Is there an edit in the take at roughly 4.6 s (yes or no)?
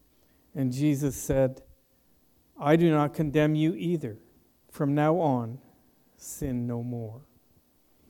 yes